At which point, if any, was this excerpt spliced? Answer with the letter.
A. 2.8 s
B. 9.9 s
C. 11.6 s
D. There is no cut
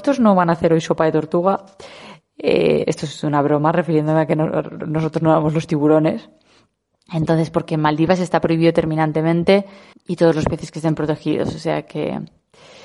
B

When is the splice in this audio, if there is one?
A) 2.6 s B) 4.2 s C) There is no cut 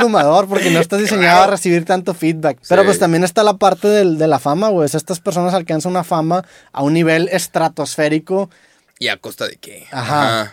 A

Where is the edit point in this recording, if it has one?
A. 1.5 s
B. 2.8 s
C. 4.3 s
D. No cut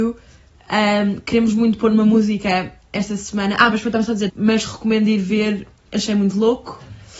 C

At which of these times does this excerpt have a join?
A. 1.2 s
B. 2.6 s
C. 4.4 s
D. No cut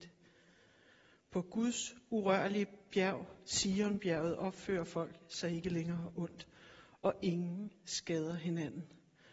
D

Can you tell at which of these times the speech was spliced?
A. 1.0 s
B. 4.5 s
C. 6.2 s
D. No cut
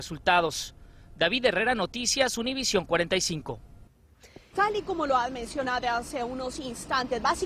B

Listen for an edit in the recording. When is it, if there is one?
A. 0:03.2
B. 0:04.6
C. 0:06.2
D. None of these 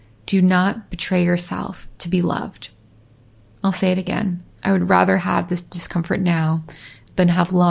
B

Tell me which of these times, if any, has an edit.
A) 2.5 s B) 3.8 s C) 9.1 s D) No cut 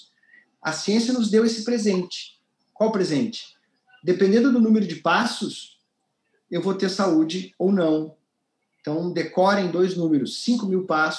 D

